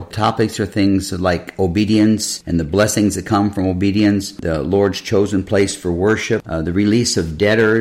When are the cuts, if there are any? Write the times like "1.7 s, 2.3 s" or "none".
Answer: 6.4 s